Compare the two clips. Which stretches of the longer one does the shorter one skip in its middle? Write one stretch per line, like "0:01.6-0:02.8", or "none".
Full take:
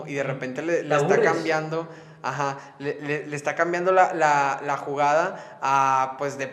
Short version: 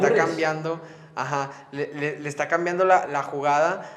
0:04.1-0:04.6

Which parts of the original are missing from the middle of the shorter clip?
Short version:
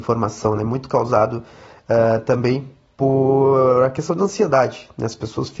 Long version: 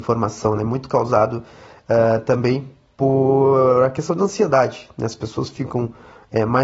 none

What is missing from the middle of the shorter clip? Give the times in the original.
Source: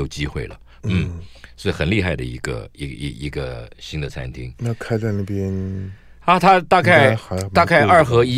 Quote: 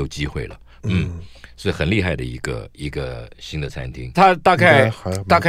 0:02.8-0:03.2
0:04.5-0:06.4

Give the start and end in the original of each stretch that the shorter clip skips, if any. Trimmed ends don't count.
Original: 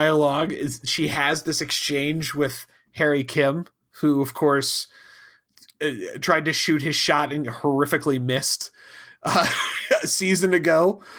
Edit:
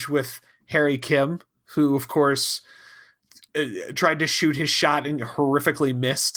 none

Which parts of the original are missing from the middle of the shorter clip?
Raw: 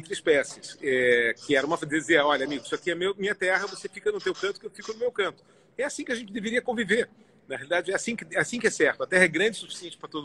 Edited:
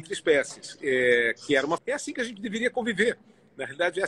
0:01.8-0:05.7

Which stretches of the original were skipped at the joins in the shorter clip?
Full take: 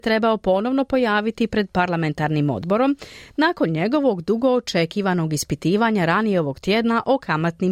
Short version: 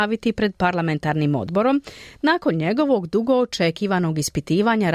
none

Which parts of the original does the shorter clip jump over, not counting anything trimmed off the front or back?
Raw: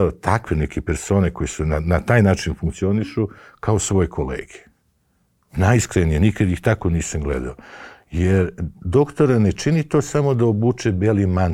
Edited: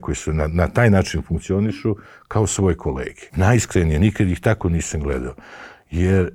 0:04.6-0:05.5

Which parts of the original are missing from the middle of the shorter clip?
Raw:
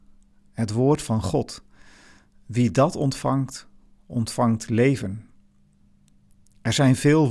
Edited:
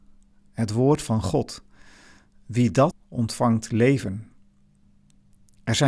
0:02.9-0:03.9

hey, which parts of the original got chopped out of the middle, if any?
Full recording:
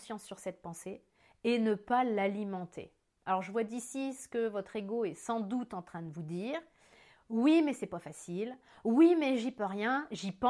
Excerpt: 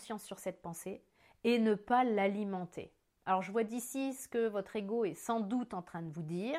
none

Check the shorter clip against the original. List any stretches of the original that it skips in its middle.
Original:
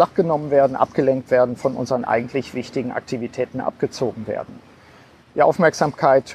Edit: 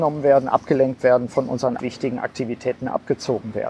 0:02.1-0:02.5

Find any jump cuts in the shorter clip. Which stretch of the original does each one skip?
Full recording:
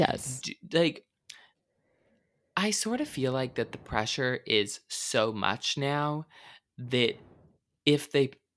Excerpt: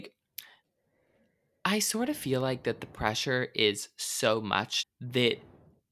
0:05.7-0:06.6

